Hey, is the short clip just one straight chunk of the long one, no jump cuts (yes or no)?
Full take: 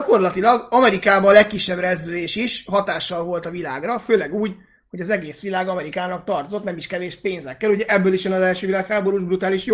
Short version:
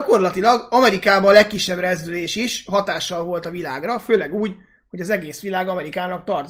yes